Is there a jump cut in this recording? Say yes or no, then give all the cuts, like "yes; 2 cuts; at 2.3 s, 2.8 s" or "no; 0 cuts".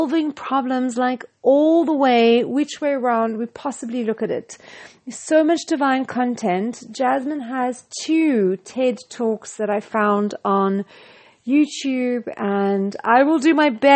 no; 0 cuts